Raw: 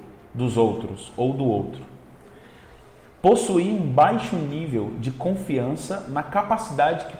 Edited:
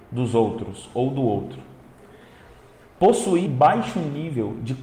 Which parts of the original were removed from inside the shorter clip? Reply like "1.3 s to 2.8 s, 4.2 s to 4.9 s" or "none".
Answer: 3.7 s to 3.8 s